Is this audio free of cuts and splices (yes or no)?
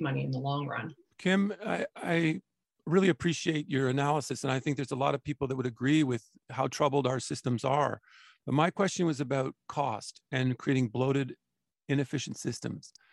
yes